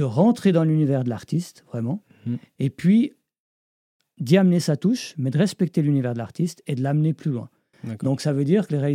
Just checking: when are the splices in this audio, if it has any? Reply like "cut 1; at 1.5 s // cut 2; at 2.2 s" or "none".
none